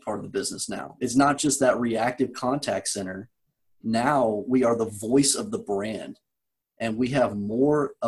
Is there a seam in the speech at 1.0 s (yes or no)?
no